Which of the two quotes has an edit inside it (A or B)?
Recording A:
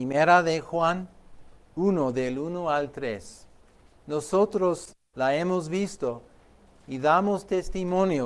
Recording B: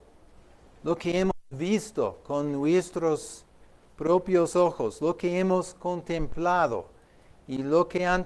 A